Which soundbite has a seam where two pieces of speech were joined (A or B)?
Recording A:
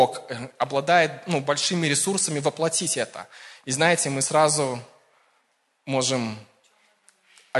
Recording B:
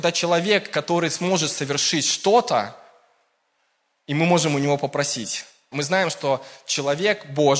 B